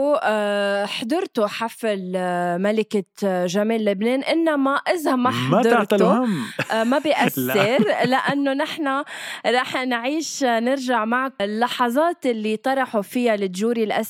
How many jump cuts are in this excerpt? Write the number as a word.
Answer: one